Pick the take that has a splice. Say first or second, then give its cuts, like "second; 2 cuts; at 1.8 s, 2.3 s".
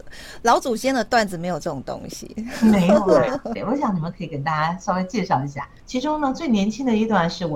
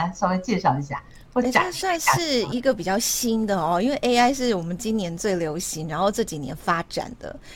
first; 2 cuts; at 3.6 s, 5.8 s